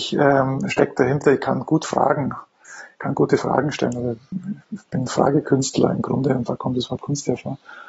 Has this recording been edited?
no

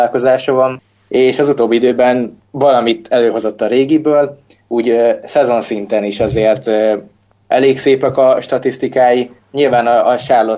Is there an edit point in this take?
no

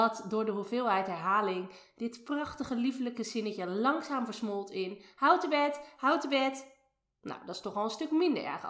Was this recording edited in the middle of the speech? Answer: yes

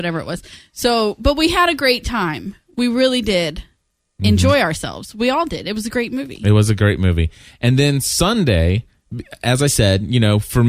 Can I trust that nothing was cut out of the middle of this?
yes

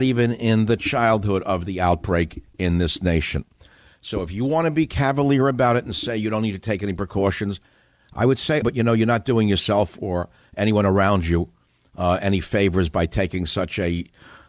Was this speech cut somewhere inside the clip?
yes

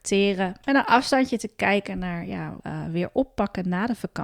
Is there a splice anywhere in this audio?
yes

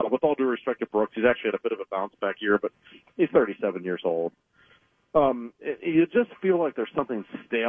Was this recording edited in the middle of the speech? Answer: no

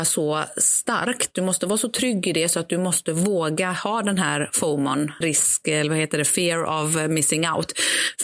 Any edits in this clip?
yes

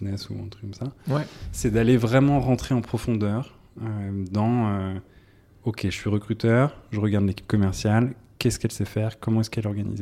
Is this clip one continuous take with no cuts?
yes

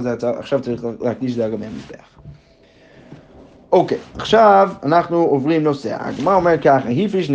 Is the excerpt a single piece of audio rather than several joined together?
yes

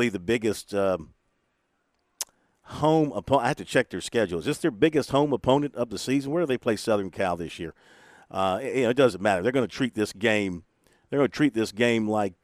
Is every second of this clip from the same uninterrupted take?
yes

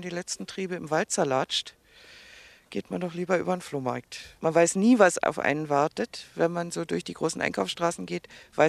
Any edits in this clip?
yes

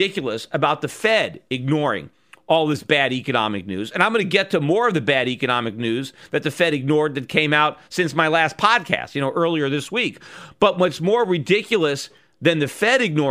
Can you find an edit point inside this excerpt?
no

